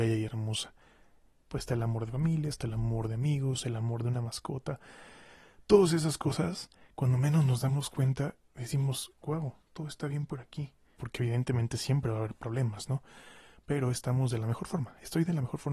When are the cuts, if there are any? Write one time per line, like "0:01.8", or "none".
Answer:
0:01.5
0:11.0